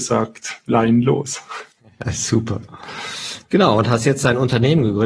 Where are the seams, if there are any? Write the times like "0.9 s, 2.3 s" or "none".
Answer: none